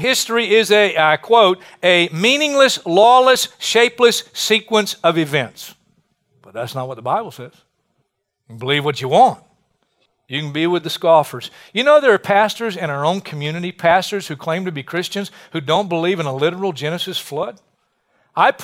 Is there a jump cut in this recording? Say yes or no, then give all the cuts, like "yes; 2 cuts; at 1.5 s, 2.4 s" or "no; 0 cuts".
no; 0 cuts